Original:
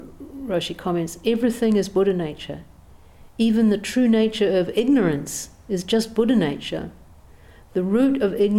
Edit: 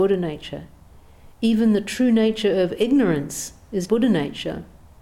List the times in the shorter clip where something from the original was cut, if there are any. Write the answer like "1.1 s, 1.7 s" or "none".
3.9 s